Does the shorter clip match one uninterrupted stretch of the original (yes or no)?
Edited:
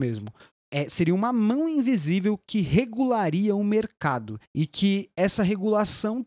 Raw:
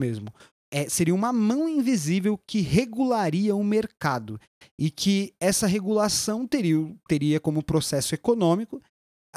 no